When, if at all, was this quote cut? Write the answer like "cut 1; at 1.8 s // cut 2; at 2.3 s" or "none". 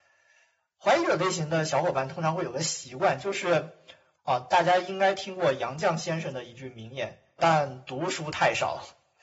cut 1; at 4.2 s // cut 2; at 7.4 s